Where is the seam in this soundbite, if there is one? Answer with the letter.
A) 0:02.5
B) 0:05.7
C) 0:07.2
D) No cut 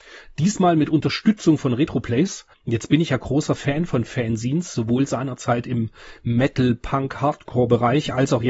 A